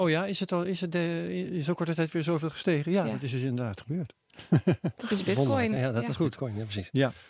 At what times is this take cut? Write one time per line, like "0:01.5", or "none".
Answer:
none